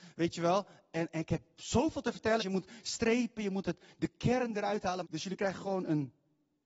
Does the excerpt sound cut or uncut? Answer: cut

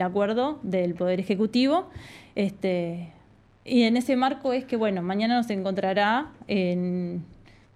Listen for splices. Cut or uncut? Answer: uncut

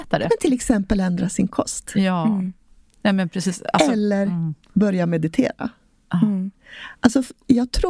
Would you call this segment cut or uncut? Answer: cut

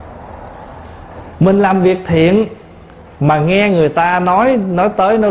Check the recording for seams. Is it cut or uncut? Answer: uncut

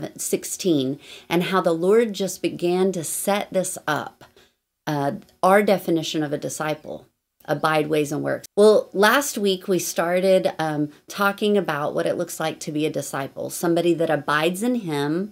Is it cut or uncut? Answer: cut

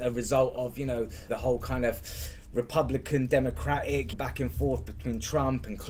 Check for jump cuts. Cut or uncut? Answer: cut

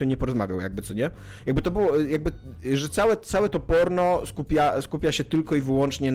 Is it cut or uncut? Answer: uncut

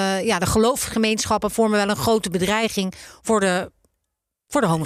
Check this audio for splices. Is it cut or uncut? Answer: uncut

